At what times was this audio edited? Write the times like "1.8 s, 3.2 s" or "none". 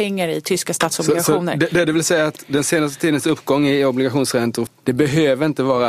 4.7 s